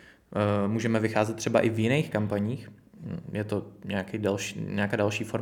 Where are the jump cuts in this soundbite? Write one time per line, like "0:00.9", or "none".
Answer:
none